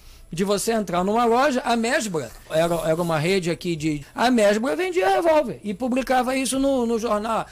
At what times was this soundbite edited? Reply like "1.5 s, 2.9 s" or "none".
2.5 s, 4.0 s